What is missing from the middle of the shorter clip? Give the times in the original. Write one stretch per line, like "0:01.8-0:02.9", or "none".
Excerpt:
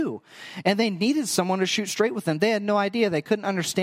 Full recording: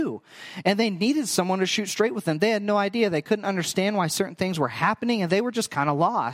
none